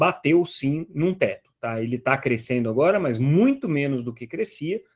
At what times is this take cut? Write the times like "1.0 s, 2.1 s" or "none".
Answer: none